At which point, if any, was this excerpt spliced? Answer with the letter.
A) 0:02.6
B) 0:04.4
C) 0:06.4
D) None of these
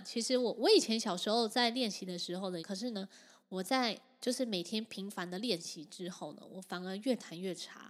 A